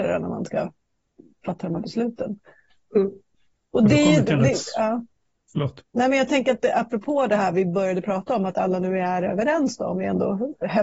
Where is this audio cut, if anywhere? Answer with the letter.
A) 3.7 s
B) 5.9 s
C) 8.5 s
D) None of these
B